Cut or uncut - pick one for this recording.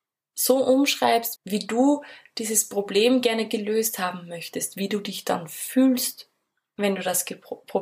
cut